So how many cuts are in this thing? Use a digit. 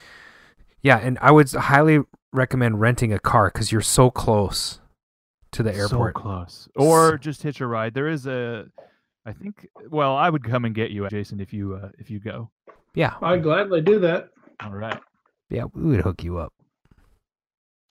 2